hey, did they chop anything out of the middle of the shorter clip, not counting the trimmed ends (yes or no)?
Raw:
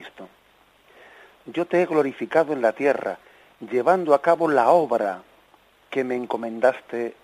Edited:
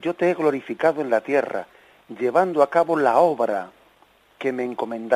no